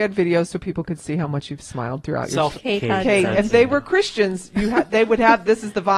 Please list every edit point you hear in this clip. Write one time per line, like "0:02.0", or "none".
0:02.5